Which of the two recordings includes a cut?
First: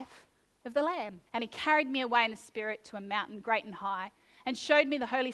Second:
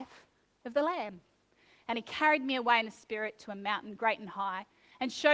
first; 1 cut; at 1.3 s

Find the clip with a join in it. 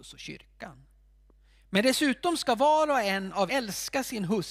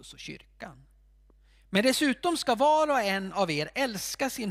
first; 1 cut; at 3.5 s

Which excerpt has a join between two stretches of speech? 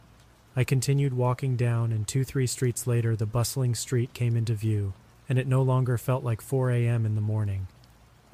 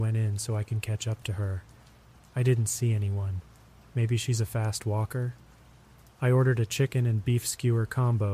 second; 1 cut; at 6.1 s

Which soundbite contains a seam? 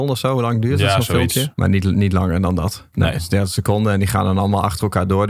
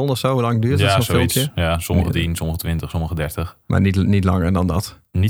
first; 2 cuts; at 1.5 s, 2.9 s

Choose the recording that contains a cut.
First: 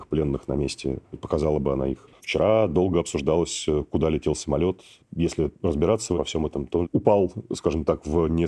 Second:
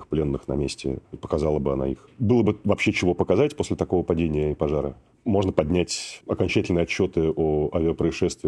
first; 1 cut; at 2.1 s

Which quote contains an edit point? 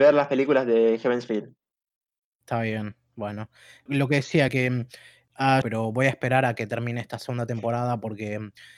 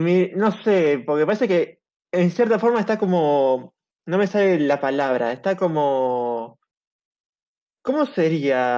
first; 2 cuts; at 3.9 s, 5.6 s

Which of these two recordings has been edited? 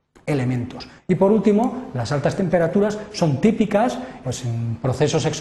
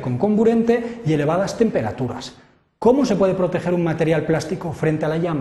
first; 2 cuts; at 1.0 s, 4.2 s

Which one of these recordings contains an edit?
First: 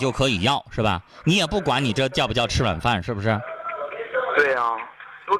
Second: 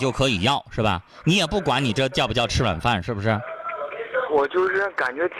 second; 1 cut; at 4.3 s

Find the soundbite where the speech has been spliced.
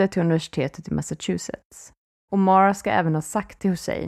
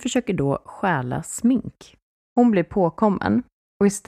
first; 1 cut; at 2.2 s

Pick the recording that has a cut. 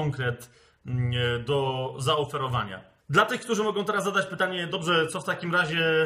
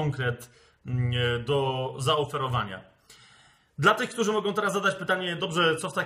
first; 1 cut; at 3.0 s

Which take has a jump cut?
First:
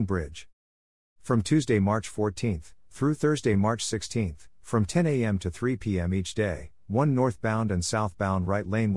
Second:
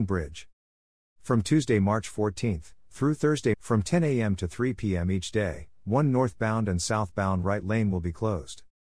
second; 1 cut; at 3.5 s

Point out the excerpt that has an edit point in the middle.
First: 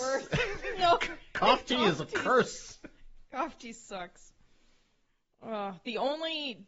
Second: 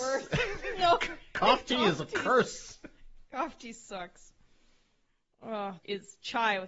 second; 1 cut; at 5.8 s

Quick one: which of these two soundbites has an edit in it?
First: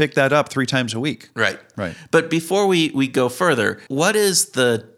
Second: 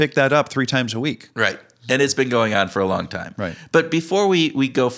first; 2 cuts; at 1.7 s, 3.9 s

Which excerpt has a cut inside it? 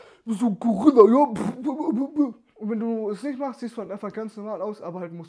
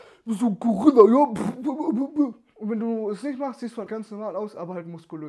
second; 1 cut; at 3.9 s

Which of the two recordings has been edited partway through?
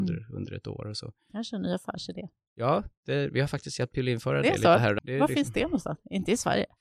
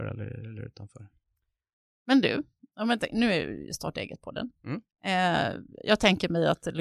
first; 1 cut; at 5.0 s

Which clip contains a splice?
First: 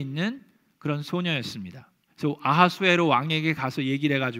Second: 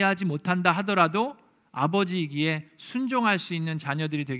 first; 1 cut; at 2.1 s

